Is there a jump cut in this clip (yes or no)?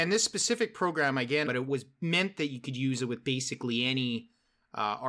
yes